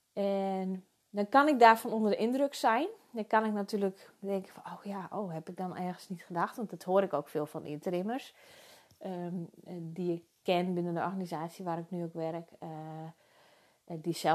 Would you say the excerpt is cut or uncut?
uncut